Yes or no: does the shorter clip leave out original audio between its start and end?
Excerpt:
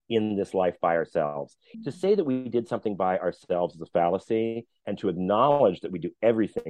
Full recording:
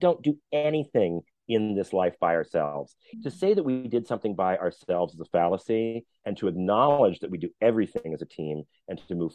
no